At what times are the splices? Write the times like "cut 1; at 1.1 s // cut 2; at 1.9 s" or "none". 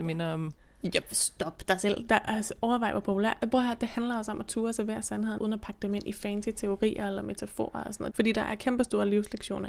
cut 1; at 5.4 s // cut 2; at 8.1 s